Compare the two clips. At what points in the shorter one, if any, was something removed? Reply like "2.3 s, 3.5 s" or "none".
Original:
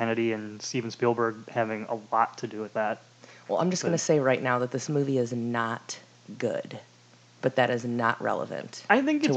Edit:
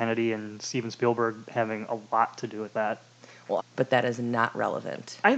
3.6 s